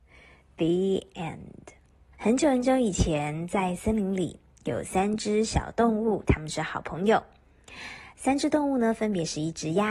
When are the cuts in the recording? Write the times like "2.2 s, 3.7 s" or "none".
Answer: 2.1 s, 6.2 s